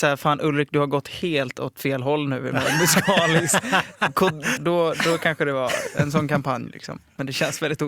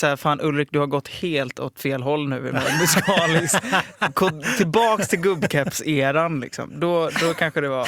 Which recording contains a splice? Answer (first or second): first